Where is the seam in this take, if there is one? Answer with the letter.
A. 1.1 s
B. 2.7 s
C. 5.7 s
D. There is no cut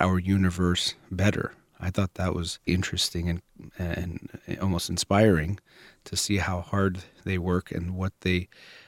B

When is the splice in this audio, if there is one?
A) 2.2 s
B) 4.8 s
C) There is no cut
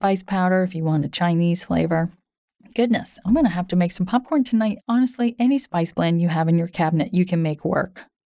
B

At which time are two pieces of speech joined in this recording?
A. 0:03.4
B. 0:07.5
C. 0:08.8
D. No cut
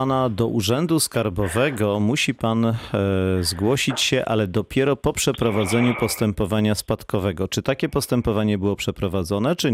D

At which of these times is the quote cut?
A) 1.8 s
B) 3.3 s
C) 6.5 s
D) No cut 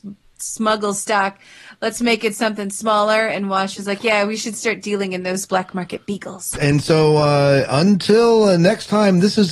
C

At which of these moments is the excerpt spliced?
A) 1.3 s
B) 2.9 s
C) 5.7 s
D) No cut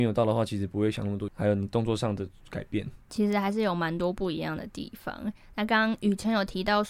A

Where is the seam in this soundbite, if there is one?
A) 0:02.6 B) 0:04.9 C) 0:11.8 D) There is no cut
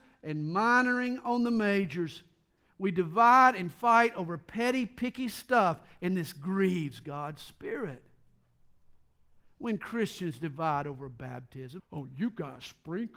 C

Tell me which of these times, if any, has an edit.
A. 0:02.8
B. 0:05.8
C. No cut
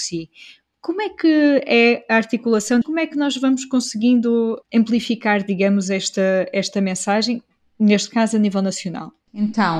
A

